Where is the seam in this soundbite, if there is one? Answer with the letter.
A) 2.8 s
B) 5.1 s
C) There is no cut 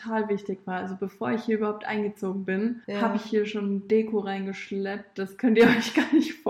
A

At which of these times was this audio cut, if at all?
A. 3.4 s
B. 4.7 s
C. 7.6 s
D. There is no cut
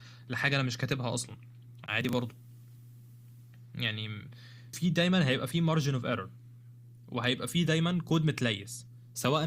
B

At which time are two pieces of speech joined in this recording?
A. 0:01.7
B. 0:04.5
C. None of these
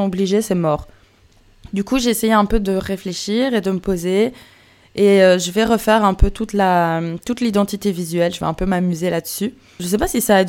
C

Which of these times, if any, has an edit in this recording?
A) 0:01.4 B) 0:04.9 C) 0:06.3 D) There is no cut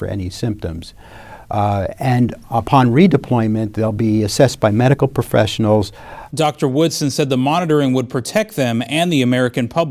C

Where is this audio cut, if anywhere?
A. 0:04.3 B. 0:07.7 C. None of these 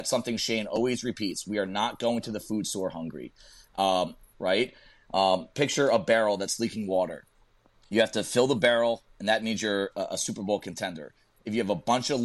A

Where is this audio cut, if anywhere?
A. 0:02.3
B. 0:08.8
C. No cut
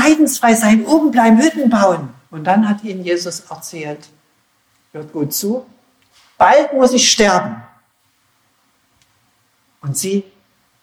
A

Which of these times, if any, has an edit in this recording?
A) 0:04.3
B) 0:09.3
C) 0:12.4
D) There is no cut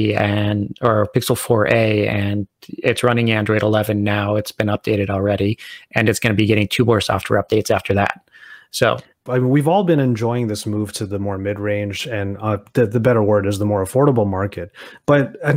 B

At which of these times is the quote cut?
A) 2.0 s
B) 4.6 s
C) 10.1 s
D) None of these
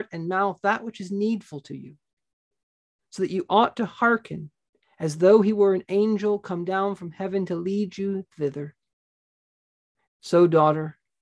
C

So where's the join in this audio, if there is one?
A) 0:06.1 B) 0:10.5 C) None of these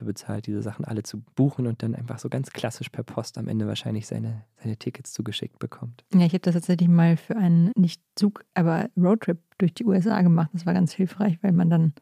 C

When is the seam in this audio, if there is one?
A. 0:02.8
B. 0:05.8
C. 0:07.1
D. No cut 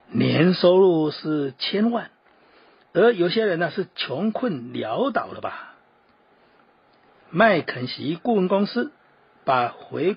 D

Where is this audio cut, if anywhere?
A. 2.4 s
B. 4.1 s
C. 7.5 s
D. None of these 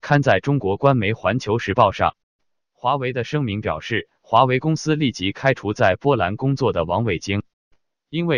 D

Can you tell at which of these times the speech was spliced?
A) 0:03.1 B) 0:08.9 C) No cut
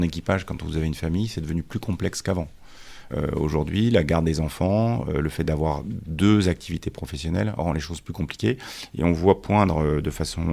A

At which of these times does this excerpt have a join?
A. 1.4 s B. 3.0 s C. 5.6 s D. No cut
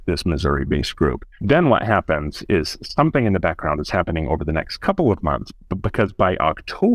A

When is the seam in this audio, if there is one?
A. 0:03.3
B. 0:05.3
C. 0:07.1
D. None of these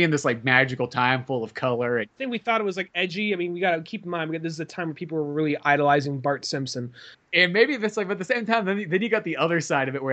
C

